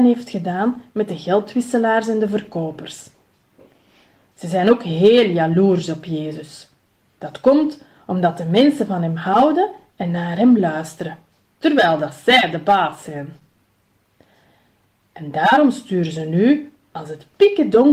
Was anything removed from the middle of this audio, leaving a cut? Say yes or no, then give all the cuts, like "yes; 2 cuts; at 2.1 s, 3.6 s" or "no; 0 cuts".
no; 0 cuts